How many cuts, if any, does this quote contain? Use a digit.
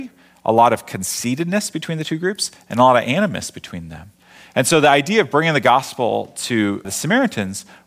1